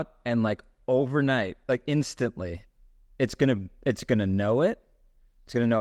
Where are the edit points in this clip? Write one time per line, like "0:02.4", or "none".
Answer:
none